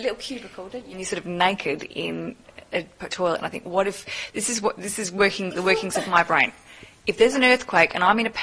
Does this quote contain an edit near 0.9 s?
yes; 1 cut; at 0.9 s

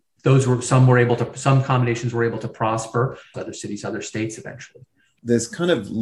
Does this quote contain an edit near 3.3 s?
yes; 1 cut; at 3.3 s

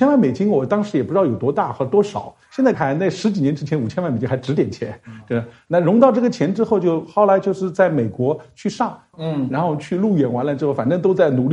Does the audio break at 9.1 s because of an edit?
yes; 2 cuts; at 2.7 s, 9.1 s

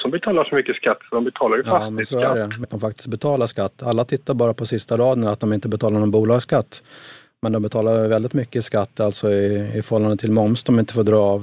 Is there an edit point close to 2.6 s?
yes; 1 cut; at 2.6 s

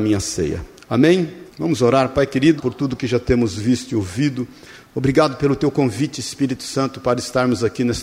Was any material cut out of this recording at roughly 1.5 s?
yes; 2 cuts; at 1.5 s, 2.6 s

